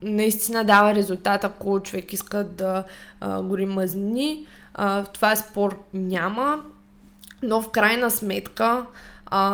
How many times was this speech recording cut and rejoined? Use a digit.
0